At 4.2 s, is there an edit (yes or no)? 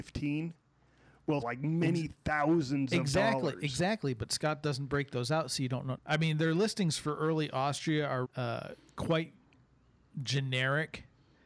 no